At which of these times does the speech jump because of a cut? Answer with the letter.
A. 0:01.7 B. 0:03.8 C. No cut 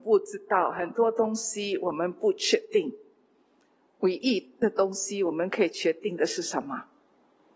C